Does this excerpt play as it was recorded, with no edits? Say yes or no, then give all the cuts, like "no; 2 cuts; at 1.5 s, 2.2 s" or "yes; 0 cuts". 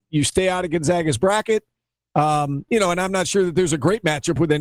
yes; 0 cuts